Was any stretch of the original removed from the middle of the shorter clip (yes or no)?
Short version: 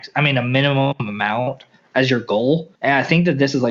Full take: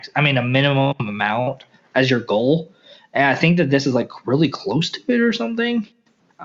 yes